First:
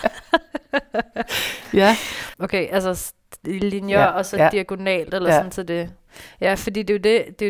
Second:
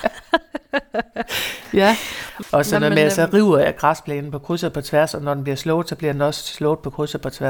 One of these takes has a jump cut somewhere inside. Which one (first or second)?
first